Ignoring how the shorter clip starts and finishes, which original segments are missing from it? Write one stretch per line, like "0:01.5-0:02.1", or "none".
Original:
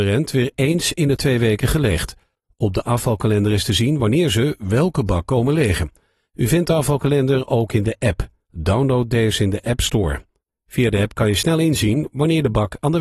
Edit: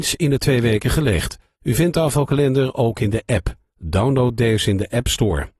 0:02.3-0:06.3

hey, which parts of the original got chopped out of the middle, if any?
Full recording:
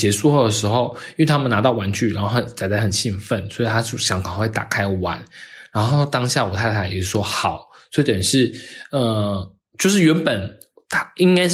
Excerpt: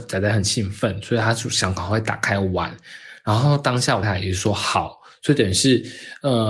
0:06.5-0:06.7

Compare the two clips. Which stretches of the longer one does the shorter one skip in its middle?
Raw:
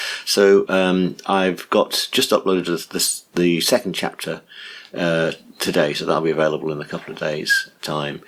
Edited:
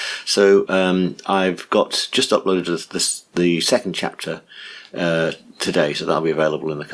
none

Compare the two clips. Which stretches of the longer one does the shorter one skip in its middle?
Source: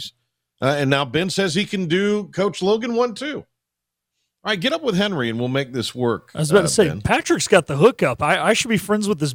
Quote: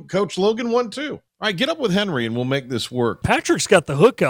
0:03.5-0:04.3
0:06.3-0:07.0

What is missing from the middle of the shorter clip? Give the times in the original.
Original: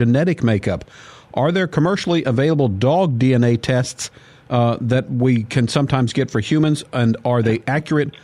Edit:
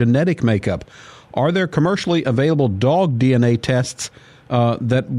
none

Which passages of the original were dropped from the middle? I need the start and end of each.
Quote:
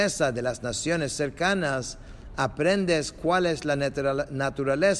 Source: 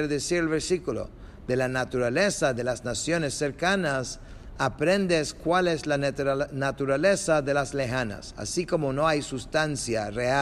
none

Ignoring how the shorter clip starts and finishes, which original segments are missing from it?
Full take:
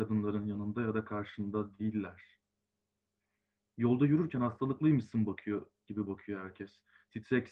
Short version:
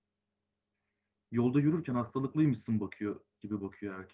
none

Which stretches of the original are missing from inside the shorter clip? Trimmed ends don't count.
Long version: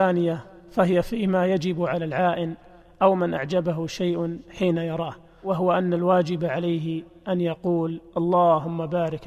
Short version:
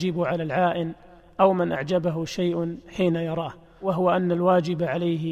none

